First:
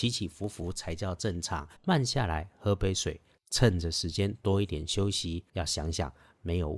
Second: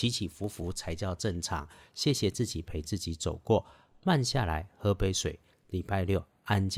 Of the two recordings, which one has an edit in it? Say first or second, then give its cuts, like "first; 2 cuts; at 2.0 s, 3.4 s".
first; 3 cuts; at 1.8 s, 3.4 s, 5.5 s